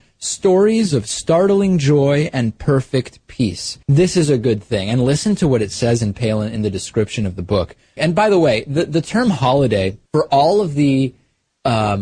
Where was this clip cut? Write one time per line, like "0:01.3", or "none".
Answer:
0:03.8
0:08.0
0:10.1